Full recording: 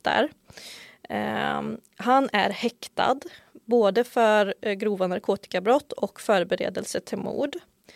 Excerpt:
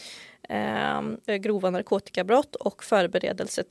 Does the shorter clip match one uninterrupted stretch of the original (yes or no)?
no